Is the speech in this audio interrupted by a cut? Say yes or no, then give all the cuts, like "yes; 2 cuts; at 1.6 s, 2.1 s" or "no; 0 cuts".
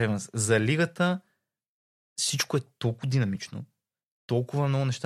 no; 0 cuts